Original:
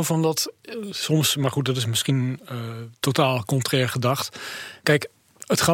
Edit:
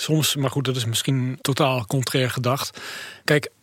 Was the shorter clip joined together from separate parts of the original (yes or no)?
yes